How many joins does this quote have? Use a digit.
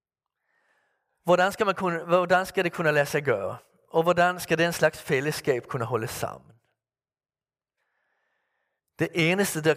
1